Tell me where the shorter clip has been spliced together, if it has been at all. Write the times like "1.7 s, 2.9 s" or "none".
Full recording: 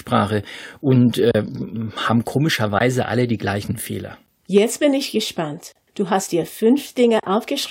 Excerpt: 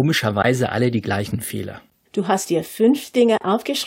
2.0 s